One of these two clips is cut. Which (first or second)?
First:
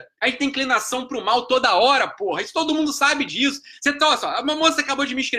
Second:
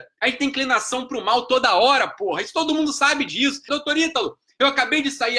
second